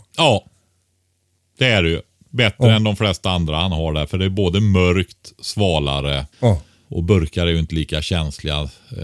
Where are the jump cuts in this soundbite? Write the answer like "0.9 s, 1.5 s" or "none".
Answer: 6.3 s